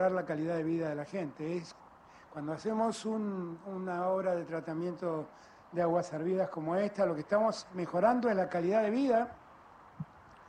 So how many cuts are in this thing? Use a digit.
0